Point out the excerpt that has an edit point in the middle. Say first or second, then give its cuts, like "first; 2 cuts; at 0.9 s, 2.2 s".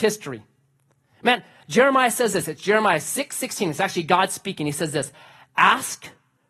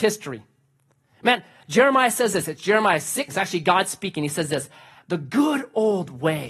second; 2 cuts; at 3.3 s, 5.0 s